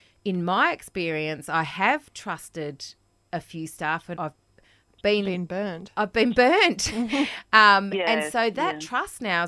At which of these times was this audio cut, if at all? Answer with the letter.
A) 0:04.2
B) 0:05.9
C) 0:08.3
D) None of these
A